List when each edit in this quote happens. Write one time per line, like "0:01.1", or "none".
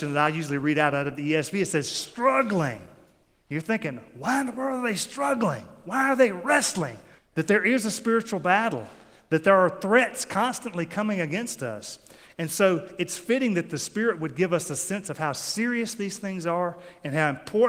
0:07.2